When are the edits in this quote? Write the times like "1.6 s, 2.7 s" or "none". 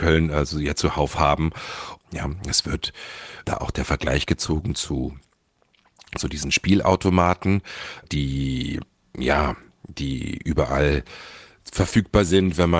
2.0 s, 3.4 s, 8.0 s